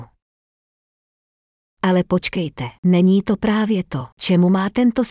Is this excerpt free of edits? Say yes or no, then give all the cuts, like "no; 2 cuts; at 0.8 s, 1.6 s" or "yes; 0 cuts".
yes; 0 cuts